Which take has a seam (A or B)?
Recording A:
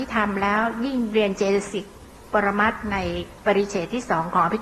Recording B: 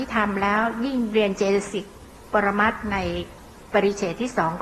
A